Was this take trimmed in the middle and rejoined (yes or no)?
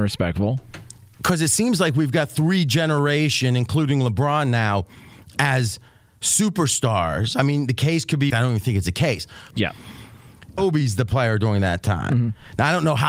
yes